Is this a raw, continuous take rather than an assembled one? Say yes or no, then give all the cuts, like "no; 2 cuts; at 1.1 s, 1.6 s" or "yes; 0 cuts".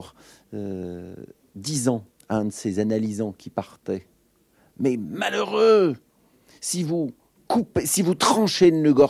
yes; 0 cuts